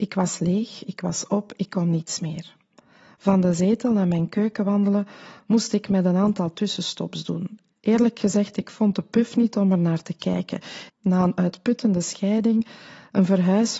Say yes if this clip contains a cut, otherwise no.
yes